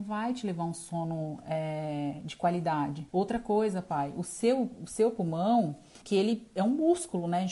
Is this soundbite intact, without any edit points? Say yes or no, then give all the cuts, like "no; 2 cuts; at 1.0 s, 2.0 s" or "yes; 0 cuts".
no; 2 cuts; at 3.1 s, 6.0 s